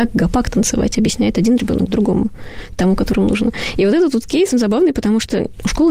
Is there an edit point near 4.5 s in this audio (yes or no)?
yes